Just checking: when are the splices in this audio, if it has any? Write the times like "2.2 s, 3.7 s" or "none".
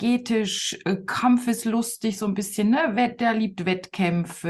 none

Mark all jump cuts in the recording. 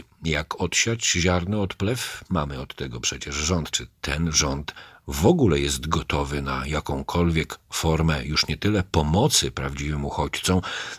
2.3 s, 3.7 s

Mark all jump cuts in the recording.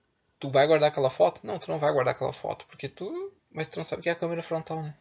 3.4 s

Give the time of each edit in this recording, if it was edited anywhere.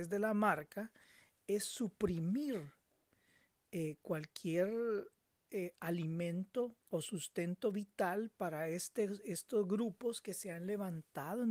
6.8 s

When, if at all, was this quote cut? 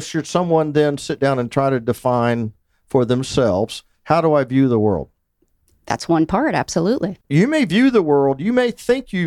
7.2 s

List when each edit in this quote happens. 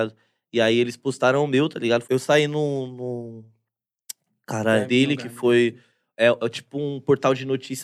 2.0 s, 4.9 s

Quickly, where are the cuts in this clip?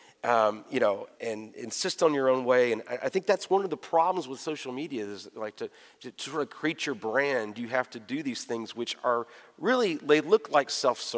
1.1 s

